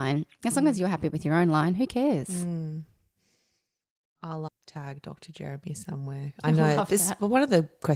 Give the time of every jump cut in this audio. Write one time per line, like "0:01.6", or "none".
0:04.5